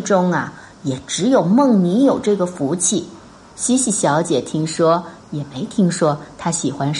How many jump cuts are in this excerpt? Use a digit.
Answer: 2